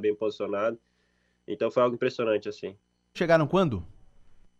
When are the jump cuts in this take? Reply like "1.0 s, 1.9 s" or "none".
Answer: 3.1 s